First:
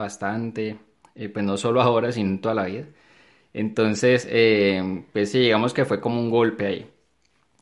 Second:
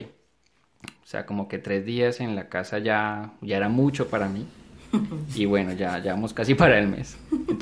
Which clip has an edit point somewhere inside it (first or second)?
second